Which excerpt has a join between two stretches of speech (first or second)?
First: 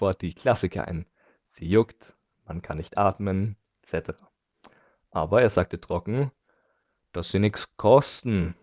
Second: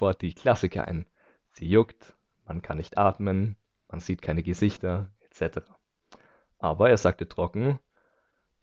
first